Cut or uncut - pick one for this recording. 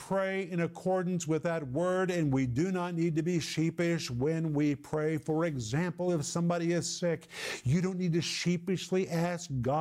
uncut